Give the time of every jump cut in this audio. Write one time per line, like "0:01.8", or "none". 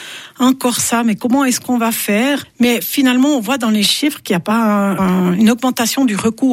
none